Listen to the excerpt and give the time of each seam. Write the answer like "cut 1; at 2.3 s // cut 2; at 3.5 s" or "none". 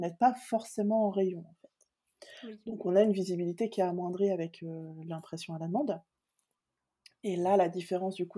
none